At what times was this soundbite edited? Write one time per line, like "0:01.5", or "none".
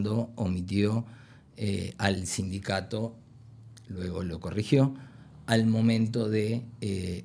none